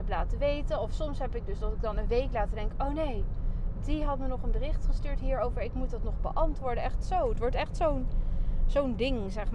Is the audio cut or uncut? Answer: uncut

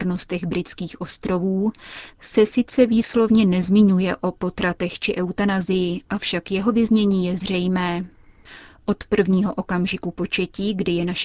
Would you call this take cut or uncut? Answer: uncut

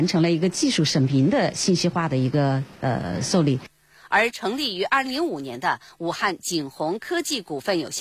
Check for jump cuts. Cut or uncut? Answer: cut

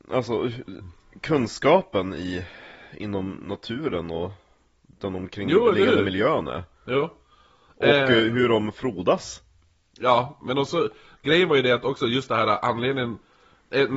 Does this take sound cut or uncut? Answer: uncut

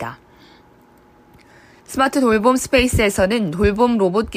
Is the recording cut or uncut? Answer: cut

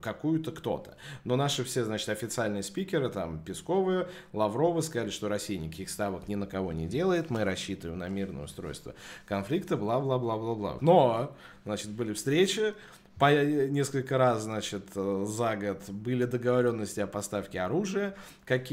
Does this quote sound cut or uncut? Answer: cut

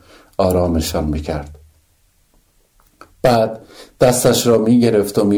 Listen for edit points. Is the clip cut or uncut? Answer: uncut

